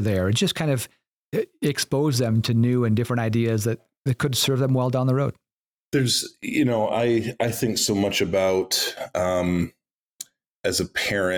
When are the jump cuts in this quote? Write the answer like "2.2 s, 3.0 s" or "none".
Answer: none